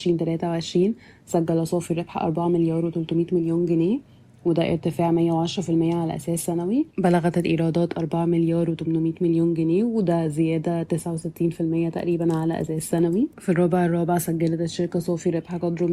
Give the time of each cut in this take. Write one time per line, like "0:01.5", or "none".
0:06.9
0:13.3